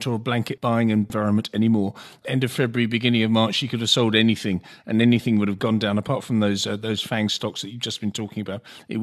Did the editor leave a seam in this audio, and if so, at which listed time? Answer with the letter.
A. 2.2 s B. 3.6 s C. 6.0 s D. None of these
D